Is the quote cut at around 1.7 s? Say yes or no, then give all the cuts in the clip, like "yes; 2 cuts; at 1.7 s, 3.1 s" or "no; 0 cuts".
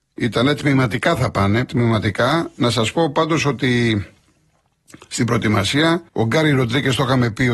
yes; 2 cuts; at 1.7 s, 6.1 s